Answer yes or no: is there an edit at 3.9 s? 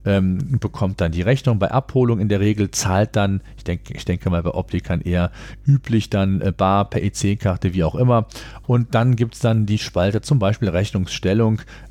no